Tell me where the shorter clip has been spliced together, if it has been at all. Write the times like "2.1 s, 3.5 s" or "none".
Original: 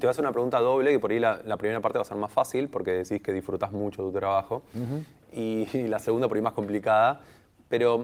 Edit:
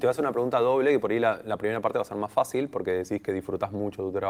none